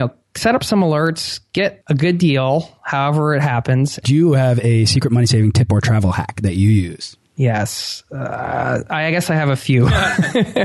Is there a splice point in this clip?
yes; 1 cut; at 4.0 s

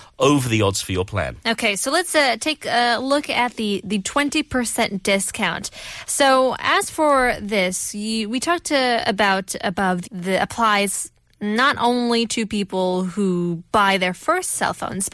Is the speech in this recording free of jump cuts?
no; 1 cut; at 10.0 s

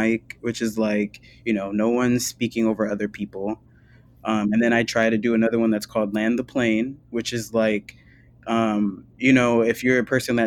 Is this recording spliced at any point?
no; 0 cuts

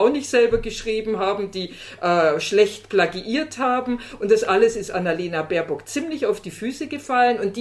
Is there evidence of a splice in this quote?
no; 0 cuts

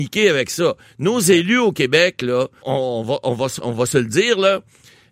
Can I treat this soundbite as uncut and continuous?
no; 1 cut; at 2.6 s

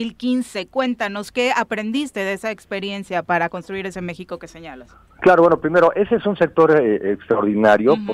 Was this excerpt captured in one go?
yes; 0 cuts

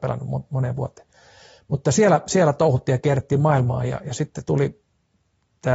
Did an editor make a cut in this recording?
no; 0 cuts

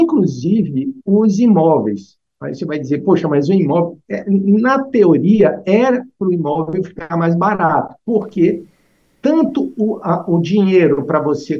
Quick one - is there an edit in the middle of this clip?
yes; 1 cut; at 8.0 s

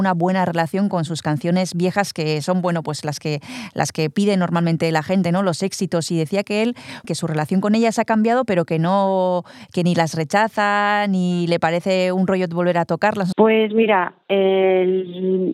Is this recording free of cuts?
no; 2 cuts; at 7.0 s, 13.3 s

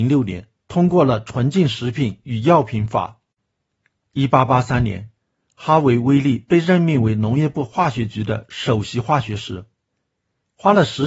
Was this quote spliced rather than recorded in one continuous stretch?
yes; 1 cut; at 4.0 s

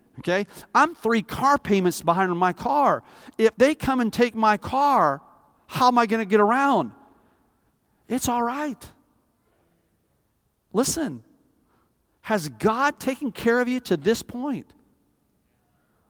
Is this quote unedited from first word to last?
yes; 0 cuts

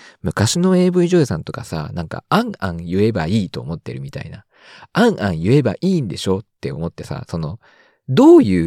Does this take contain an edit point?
no; 0 cuts

